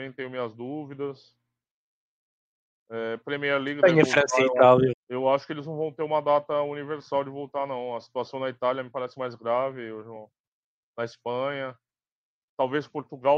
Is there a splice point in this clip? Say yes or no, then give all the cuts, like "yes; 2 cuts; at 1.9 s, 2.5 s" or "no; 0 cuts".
yes; 1 cut; at 4.9 s